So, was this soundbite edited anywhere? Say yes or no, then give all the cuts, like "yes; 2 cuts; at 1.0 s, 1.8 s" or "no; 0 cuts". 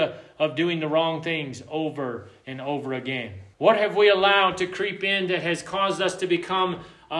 yes; 1 cut; at 3.5 s